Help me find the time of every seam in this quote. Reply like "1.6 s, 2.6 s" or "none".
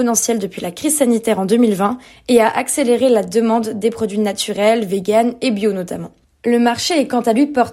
6.2 s